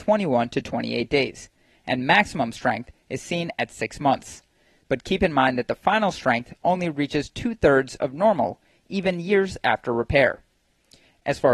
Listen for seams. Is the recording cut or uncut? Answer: uncut